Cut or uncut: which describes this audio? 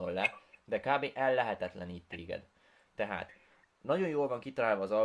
uncut